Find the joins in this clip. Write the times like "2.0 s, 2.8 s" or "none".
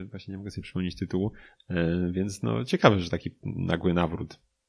1.5 s